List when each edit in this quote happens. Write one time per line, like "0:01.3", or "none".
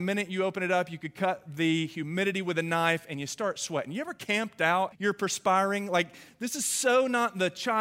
0:04.9